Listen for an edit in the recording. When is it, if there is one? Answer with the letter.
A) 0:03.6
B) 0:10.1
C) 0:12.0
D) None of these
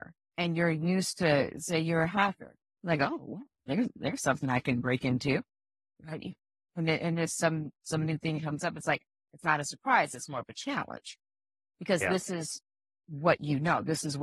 D